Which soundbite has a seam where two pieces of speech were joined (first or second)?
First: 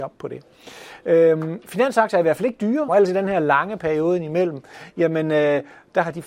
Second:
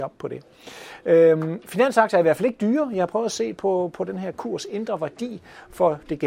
first